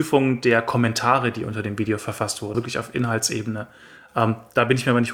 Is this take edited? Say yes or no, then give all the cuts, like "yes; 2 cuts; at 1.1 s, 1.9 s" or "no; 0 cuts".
yes; 1 cut; at 2.5 s